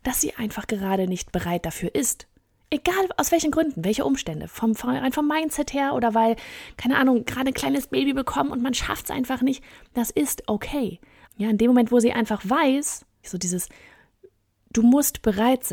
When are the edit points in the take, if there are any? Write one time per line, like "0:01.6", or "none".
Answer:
0:11.2
0:13.2